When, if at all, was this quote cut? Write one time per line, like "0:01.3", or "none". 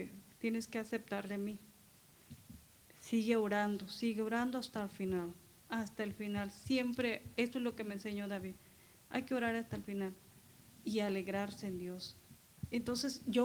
0:05.6

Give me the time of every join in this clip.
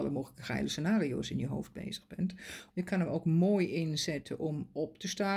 0:02.7

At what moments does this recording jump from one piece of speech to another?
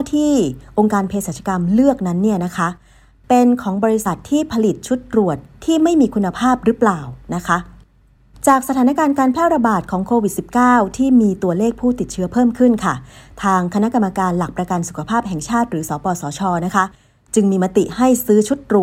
none

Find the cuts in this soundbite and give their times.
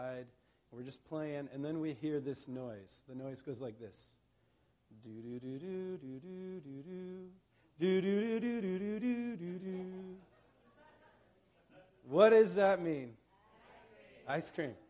0:09.6

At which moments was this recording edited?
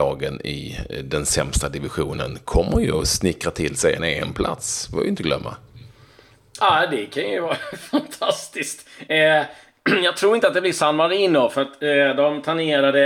none

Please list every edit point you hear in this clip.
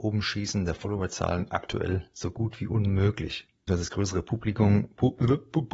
0:03.7

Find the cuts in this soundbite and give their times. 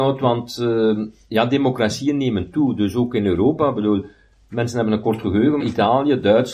0:05.6

